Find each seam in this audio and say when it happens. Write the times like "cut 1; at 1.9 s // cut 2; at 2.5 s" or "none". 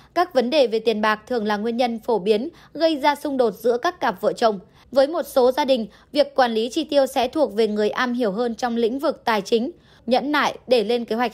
cut 1; at 4.8 s // cut 2; at 10.0 s